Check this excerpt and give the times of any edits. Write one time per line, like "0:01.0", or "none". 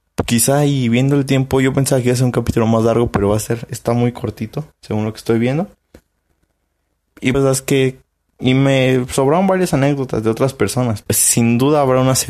0:07.3
0:11.0